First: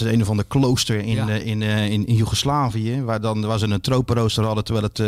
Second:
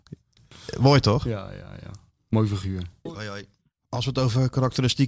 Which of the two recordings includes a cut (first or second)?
second